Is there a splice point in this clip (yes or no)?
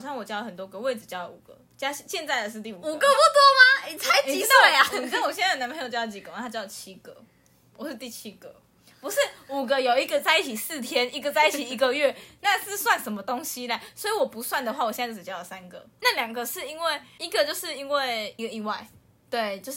no